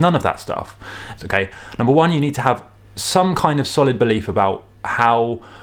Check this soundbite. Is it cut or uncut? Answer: cut